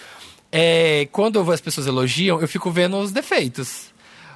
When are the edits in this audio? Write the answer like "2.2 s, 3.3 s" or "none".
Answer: none